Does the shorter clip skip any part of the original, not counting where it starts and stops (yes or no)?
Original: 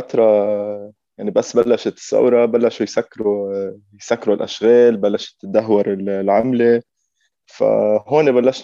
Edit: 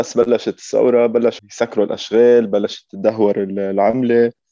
yes